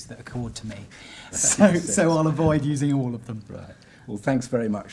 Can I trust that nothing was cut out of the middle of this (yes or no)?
no